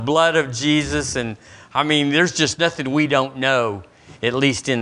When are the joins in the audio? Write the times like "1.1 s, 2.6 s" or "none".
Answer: none